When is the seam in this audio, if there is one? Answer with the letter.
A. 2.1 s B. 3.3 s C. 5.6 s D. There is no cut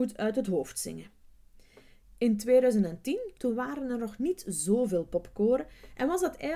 B